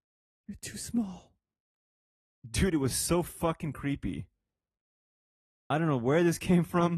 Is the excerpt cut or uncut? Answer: uncut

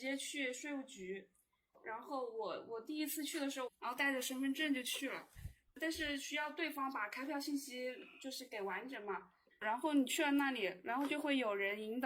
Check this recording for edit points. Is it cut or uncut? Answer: cut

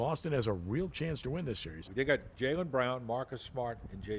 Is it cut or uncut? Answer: cut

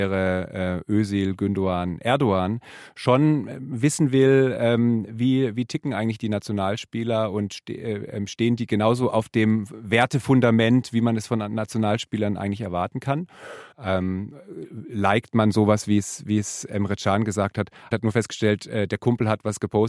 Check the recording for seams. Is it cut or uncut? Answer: cut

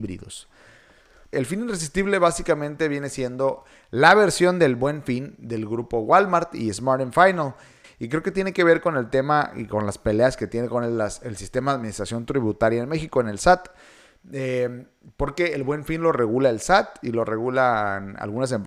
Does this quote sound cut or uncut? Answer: cut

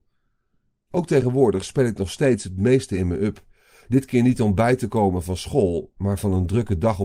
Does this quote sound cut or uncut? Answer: uncut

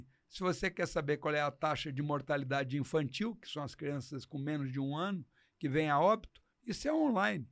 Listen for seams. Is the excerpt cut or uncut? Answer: uncut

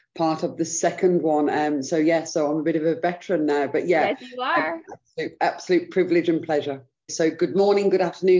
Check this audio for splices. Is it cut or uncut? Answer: cut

